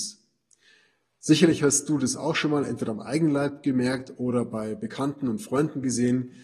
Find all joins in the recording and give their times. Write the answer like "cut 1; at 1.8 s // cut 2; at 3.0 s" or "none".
none